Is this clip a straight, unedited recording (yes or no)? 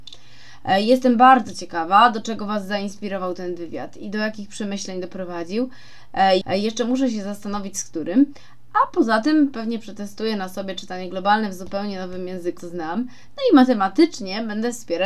no